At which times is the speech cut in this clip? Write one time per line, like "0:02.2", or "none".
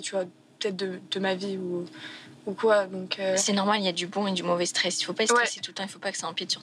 none